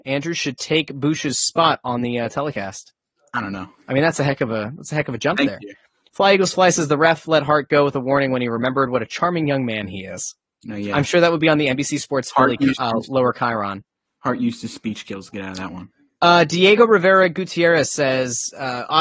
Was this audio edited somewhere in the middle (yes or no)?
no